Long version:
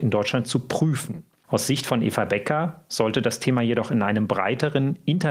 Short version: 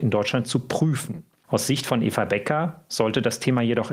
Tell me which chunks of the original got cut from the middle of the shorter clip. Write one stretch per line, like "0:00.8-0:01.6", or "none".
none